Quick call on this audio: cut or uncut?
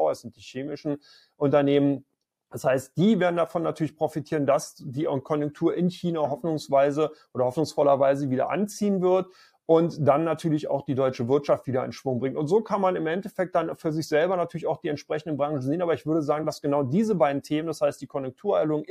uncut